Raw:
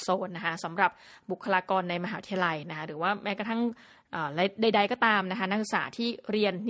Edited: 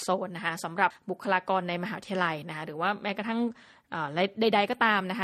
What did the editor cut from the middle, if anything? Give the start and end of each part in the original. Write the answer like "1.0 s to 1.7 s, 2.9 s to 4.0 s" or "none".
0.9 s to 1.1 s